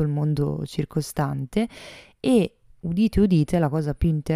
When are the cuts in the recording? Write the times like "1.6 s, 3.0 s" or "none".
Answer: none